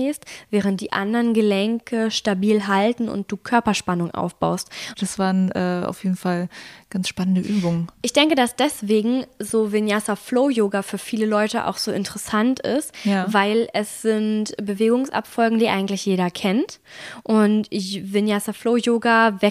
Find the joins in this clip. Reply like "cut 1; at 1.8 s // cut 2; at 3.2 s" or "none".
cut 1; at 4.9 s

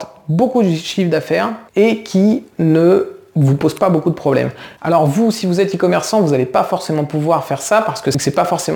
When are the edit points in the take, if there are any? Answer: cut 1; at 1.7 s // cut 2; at 4.8 s

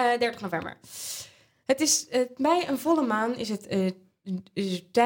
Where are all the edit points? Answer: none

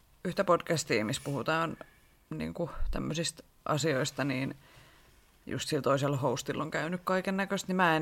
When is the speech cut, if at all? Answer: none

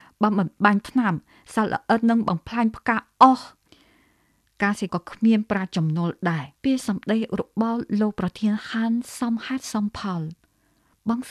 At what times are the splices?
cut 1; at 4.9 s // cut 2; at 6.6 s

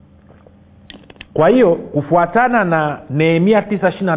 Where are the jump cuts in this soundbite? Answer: cut 1; at 1.3 s

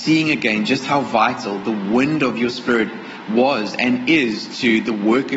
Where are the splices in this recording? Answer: none

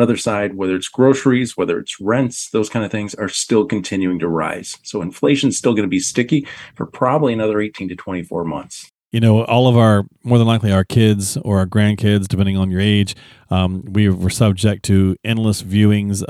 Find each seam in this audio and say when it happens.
none

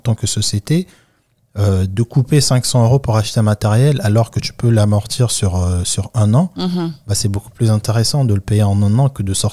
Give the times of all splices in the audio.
none

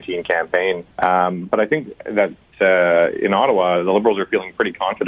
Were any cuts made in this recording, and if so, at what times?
cut 1; at 0.9 s

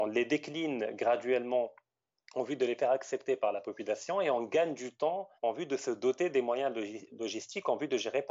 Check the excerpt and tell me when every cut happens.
cut 1; at 5.4 s

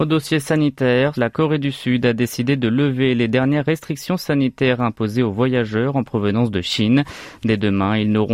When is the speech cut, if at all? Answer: cut 1; at 1.1 s

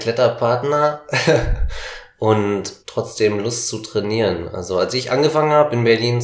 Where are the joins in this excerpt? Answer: cut 1; at 2.8 s

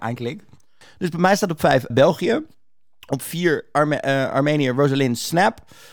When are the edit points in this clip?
cut 1; at 1.9 s

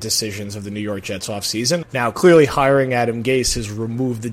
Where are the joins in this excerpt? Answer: cut 1; at 1.8 s

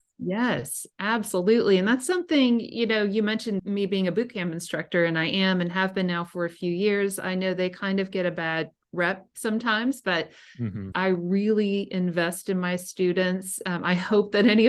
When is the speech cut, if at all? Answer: cut 1; at 3.6 s // cut 2; at 10.9 s

